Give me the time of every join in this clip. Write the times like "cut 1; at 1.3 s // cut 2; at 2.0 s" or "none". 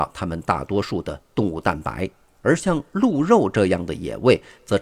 none